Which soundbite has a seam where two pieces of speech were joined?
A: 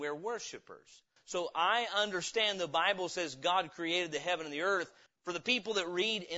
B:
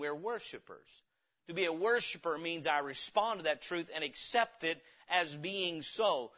A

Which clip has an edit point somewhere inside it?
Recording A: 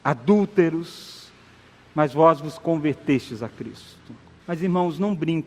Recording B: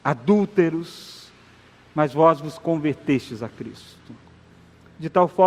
A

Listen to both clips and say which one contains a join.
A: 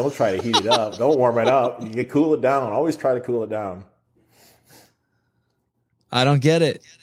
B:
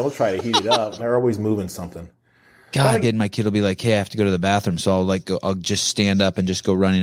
B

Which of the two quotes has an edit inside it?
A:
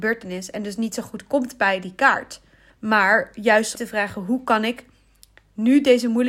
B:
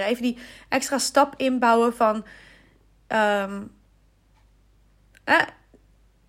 A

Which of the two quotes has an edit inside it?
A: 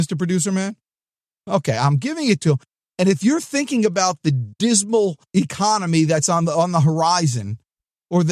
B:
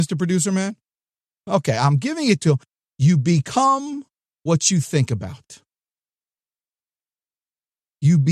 A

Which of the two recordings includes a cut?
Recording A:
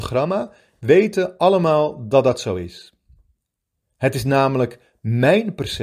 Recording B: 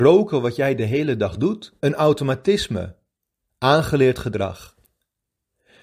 B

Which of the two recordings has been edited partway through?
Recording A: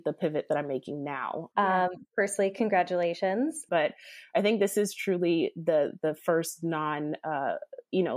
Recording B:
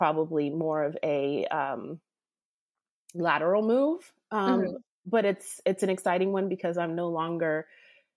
A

